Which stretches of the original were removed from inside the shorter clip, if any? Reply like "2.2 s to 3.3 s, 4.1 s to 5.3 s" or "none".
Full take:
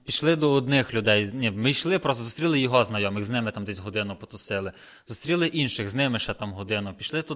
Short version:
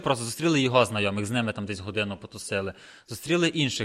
none